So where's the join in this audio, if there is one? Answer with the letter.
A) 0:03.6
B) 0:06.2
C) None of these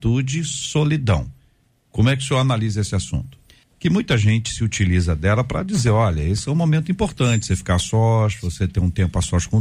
A